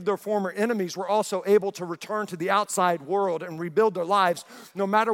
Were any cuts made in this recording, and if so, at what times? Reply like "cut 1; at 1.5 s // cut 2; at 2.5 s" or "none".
none